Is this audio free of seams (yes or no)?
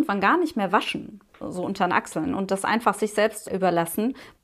yes